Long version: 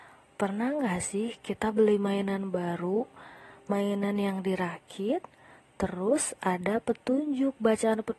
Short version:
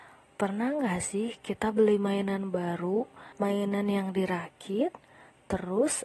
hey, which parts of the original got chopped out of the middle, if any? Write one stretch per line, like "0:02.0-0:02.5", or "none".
0:03.3-0:03.6